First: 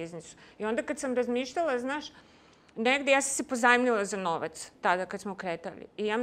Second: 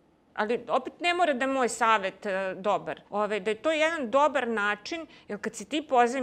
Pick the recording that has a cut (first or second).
second